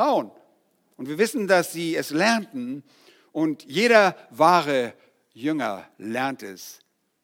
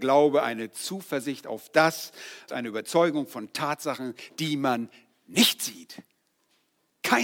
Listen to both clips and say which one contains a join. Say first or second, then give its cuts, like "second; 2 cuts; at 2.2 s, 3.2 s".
second; 1 cut; at 2.5 s